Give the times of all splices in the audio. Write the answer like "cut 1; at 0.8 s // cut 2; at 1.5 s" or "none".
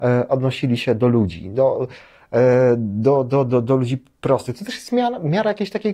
none